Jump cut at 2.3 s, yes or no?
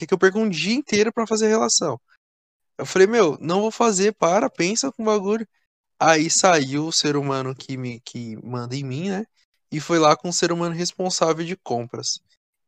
no